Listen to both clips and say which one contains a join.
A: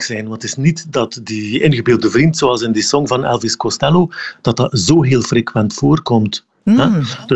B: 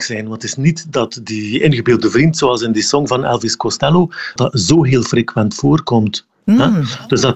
B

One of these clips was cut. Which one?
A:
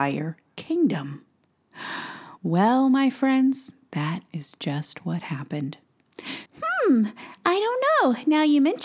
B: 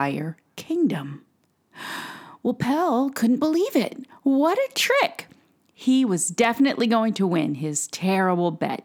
A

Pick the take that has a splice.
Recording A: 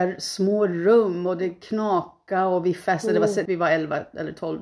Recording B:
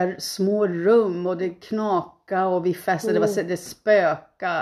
A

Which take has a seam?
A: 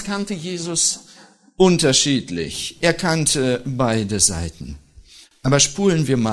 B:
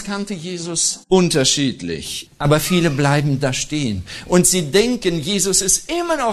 B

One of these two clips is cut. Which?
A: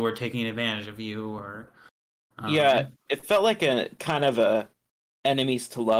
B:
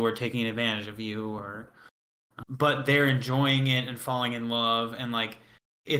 B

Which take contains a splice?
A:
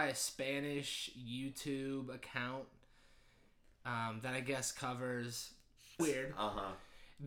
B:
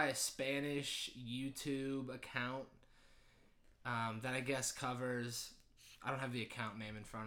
A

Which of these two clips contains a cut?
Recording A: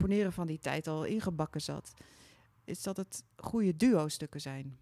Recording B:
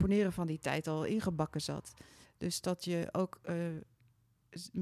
B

